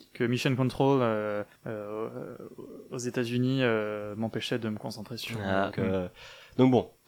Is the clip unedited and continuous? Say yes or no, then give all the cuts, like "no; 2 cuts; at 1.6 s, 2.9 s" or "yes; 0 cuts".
no; 2 cuts; at 1.5 s, 5.7 s